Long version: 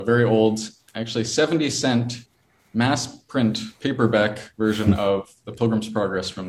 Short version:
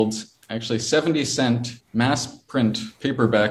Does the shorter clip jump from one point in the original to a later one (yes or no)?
yes